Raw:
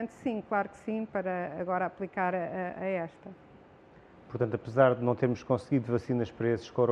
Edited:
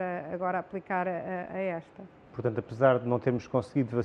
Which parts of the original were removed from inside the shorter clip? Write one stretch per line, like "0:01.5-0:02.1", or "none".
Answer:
0:03.5-0:04.2